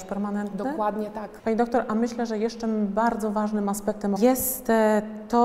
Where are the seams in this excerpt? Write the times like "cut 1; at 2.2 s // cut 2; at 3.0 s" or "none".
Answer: cut 1; at 1.4 s // cut 2; at 4.2 s